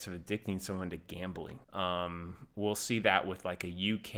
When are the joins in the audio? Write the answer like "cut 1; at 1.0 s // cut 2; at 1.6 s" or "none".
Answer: cut 1; at 1.6 s